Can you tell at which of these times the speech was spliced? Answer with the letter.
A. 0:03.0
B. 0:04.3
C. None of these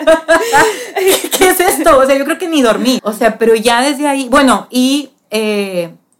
A